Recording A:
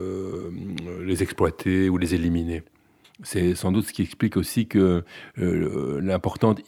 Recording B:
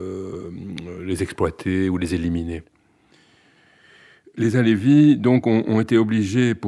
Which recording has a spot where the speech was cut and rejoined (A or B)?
A